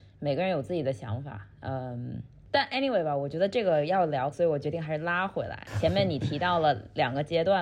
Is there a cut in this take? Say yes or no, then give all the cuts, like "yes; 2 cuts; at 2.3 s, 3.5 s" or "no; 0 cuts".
yes; 1 cut; at 4.3 s